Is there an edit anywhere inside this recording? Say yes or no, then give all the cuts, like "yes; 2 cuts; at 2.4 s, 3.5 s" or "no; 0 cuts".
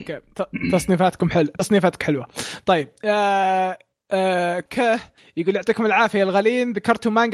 yes; 1 cut; at 4.7 s